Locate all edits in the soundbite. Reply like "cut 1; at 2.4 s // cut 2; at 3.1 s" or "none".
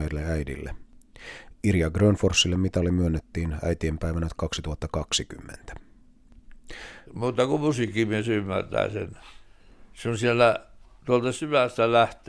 cut 1; at 7.1 s